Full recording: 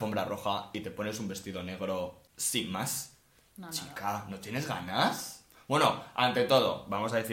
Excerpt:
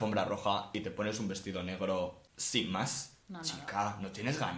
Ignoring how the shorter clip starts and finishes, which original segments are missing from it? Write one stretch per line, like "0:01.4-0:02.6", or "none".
0:03.2-0:03.5